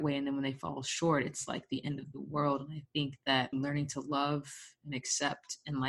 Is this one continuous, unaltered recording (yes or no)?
no